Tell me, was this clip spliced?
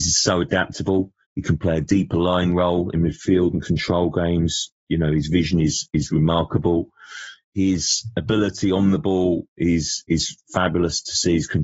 yes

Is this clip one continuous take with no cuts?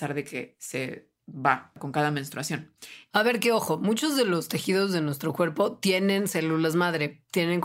no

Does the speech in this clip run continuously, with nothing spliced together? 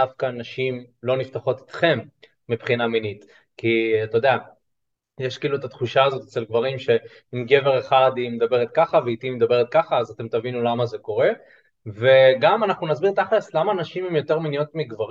yes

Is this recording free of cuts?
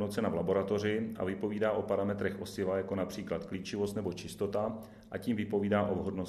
yes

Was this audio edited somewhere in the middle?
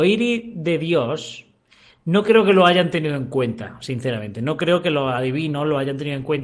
no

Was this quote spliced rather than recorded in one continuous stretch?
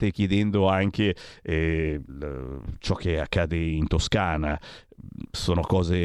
yes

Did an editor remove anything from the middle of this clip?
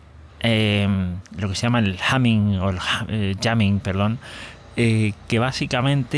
no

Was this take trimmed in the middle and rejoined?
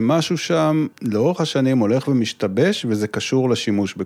yes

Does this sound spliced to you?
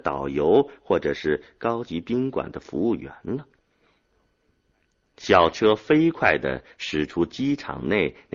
no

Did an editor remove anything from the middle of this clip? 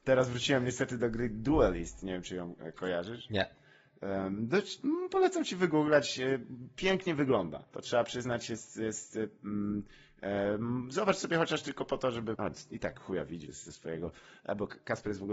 yes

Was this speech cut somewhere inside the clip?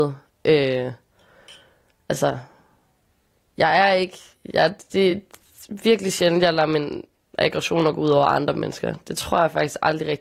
no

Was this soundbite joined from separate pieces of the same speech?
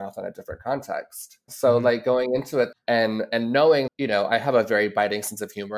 yes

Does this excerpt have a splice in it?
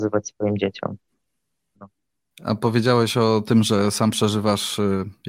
yes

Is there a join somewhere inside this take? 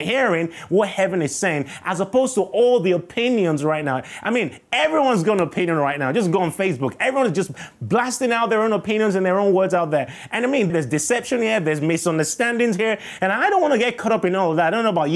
yes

